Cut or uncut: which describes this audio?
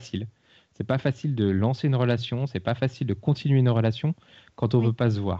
uncut